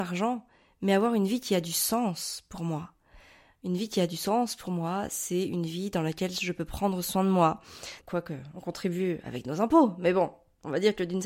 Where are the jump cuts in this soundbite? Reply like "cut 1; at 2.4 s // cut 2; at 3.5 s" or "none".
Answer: cut 1; at 8.0 s